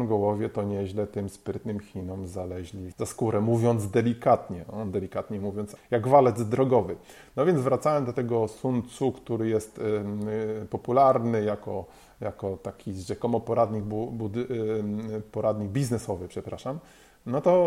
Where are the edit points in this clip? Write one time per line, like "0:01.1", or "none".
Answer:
0:02.9
0:05.8

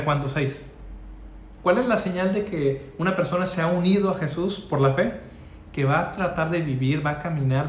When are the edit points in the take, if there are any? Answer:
0:01.6

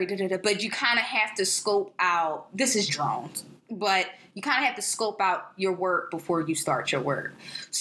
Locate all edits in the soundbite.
0:02.9

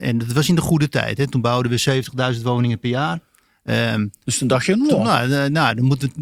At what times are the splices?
none

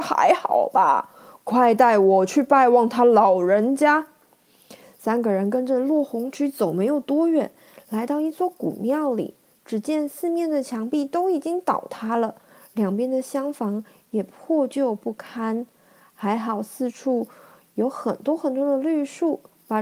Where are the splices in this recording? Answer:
none

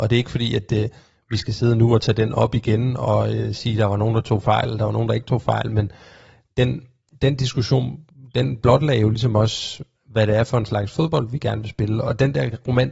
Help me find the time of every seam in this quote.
none

